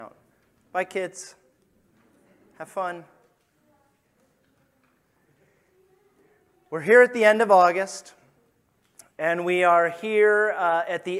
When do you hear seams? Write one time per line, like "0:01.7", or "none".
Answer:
none